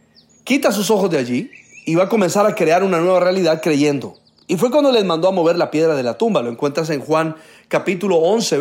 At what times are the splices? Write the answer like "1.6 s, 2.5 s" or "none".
none